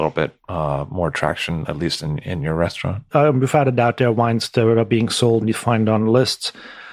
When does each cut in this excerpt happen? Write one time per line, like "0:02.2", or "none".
0:03.1
0:05.4